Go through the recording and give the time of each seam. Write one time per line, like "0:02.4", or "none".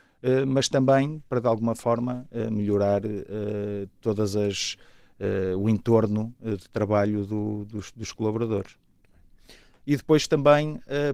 0:09.8